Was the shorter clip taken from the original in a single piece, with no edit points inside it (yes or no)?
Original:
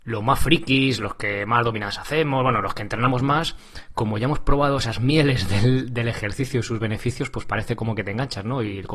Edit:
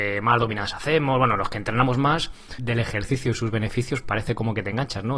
no